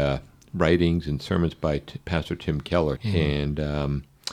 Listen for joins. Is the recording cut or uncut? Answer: cut